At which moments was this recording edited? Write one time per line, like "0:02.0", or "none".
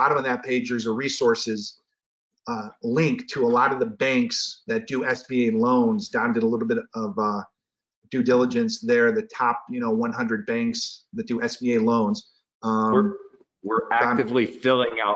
none